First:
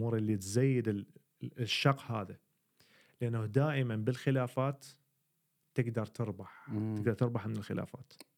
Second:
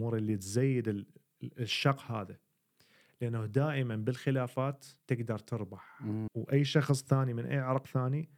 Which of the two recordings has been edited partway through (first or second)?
second